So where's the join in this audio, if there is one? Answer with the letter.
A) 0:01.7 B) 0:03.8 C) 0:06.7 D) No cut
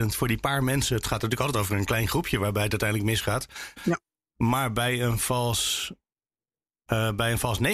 B